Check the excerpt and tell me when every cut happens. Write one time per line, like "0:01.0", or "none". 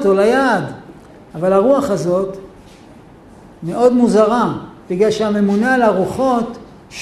none